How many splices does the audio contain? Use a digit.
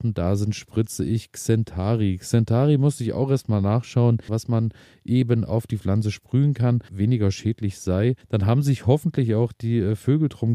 3